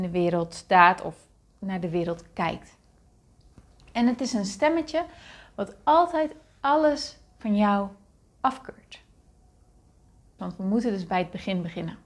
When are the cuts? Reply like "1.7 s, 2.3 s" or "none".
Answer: 10.4 s